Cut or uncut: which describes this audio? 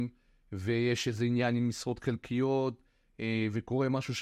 uncut